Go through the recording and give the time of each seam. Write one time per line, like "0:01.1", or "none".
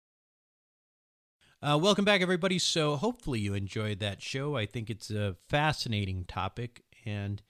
none